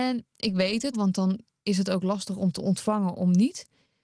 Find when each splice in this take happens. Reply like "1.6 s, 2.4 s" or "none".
0.9 s